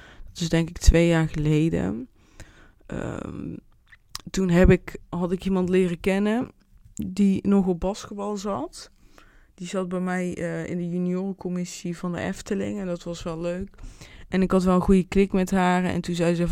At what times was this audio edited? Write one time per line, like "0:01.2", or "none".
0:05.0